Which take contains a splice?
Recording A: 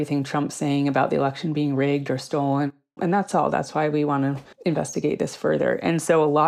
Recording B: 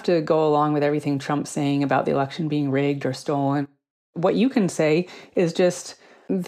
A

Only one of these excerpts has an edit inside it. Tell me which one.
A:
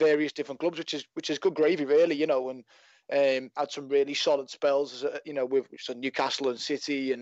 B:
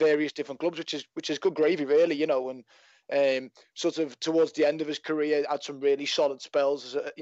A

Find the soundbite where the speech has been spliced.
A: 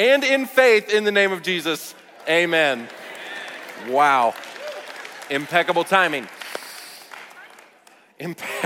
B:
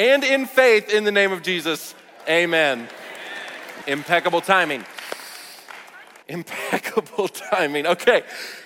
B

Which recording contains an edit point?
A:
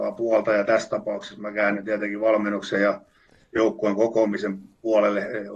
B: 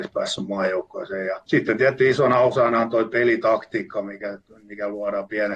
B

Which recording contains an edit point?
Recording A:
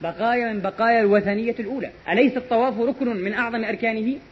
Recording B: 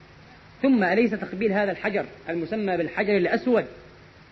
A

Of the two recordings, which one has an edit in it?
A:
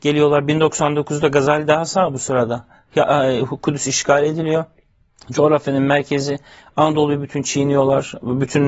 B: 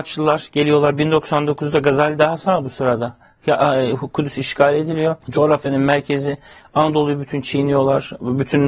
B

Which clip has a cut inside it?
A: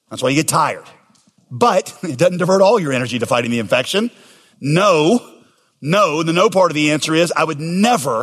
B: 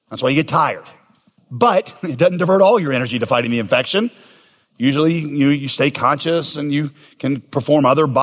A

